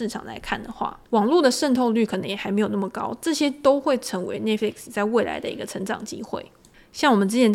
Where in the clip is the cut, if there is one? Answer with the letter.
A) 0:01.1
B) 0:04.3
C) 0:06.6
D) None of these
A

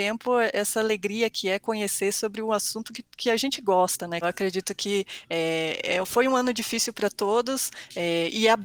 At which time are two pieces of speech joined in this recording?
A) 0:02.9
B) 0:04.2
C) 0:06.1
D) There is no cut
B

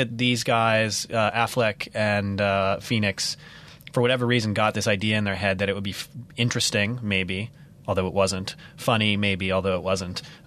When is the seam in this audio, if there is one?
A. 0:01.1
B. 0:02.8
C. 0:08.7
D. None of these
D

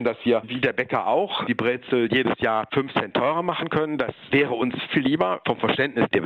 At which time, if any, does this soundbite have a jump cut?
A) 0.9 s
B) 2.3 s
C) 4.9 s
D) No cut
C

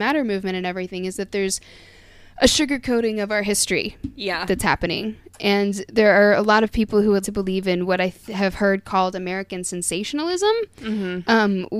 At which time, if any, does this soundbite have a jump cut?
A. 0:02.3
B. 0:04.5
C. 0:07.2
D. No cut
C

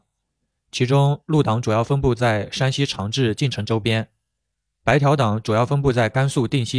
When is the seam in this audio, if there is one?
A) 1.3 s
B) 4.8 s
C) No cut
B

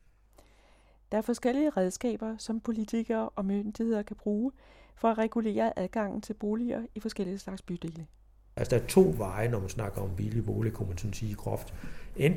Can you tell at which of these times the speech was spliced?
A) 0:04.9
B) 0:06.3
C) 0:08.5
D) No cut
C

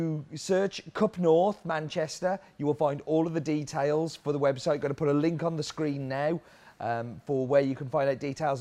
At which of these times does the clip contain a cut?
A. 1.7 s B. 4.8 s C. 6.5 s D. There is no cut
D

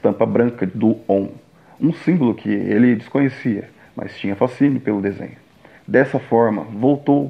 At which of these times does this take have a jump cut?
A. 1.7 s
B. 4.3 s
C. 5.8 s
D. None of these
C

